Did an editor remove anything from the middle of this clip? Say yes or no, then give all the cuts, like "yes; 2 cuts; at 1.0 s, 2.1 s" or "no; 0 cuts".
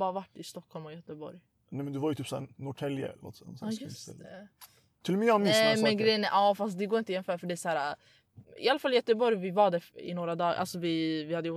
no; 0 cuts